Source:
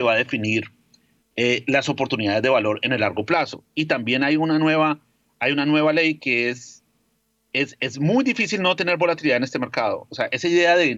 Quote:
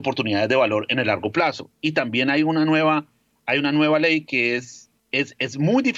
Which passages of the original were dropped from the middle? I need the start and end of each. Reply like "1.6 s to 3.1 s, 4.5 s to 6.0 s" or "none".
6.9 s to 7.4 s